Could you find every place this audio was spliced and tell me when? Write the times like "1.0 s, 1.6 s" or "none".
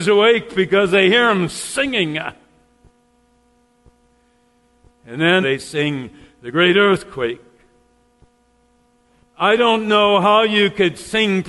5.4 s, 9.2 s